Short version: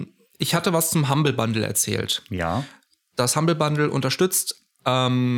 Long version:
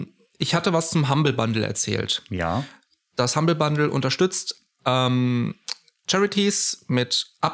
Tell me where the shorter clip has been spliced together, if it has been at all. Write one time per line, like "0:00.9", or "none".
none